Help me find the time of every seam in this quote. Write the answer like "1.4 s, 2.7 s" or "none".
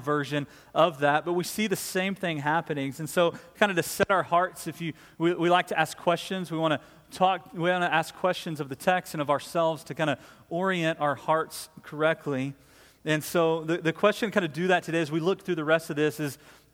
none